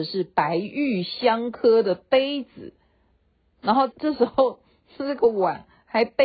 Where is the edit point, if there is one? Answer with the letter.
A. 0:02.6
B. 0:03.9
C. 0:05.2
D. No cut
B